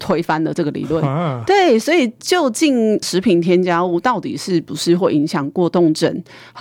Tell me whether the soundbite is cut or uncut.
uncut